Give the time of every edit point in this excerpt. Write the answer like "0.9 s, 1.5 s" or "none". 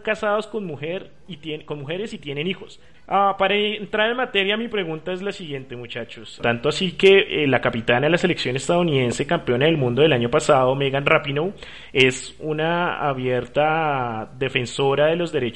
2.9 s, 6.4 s